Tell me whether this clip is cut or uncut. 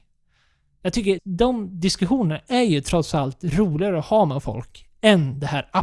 cut